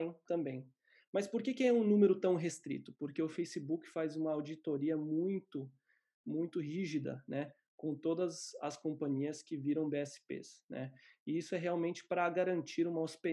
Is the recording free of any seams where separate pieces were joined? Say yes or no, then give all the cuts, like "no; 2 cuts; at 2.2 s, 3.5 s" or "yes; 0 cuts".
yes; 0 cuts